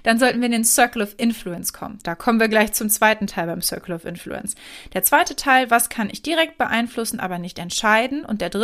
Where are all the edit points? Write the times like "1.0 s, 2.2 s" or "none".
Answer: 2.0 s